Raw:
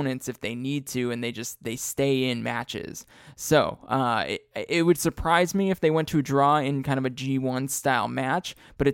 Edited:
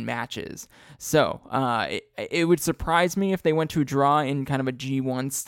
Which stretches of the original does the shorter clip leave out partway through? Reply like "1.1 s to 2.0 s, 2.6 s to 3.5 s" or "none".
none